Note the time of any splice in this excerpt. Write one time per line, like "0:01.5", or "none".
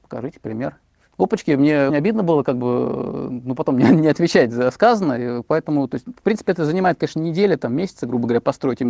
0:01.9